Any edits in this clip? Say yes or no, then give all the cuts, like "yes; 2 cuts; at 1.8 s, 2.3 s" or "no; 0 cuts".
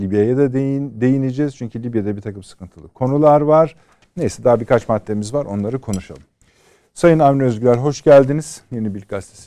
no; 0 cuts